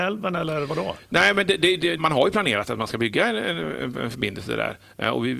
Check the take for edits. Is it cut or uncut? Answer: cut